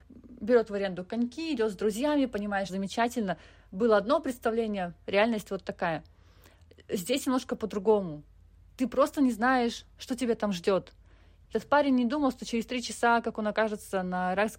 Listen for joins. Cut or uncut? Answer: cut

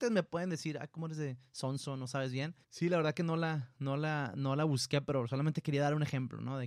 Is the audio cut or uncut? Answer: cut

